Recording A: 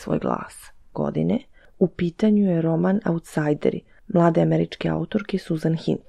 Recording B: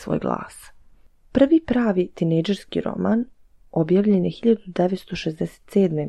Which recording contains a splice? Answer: A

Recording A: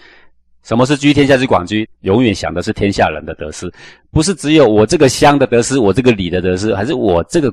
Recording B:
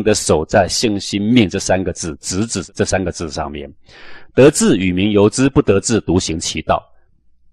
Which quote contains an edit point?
A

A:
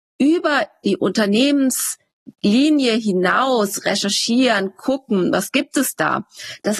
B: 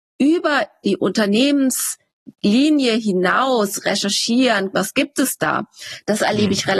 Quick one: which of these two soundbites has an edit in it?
B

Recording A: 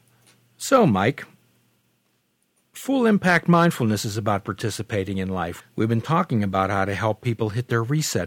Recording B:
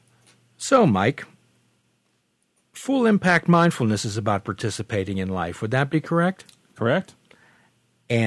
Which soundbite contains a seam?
A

